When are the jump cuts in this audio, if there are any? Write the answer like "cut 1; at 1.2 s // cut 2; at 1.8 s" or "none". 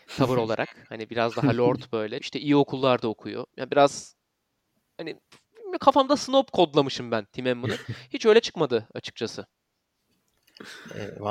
cut 1; at 2.2 s